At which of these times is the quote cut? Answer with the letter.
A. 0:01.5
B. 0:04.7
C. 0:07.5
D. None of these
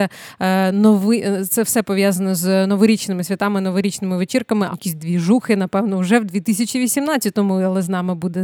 B